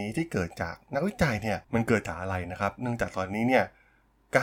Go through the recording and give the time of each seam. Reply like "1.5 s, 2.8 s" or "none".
1.6 s